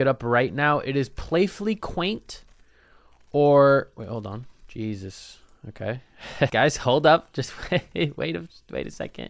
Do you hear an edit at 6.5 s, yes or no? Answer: yes